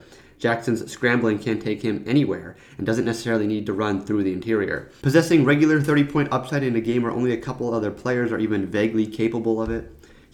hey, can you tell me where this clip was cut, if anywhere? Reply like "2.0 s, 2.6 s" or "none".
5.0 s